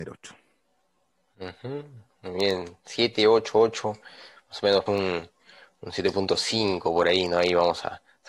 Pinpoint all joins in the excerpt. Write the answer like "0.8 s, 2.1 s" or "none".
4.9 s